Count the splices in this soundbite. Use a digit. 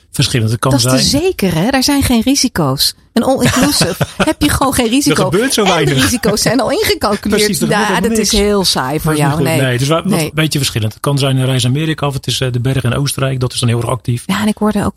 0